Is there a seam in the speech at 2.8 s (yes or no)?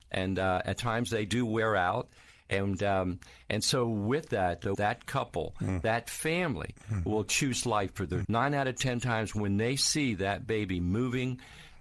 no